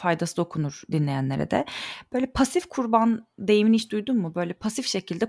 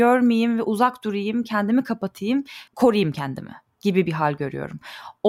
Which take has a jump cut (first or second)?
second